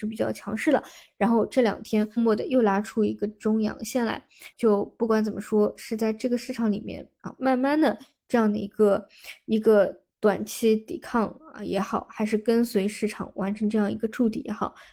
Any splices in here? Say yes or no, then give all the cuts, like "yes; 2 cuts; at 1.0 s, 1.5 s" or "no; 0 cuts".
yes; 2 cuts; at 2.2 s, 4.5 s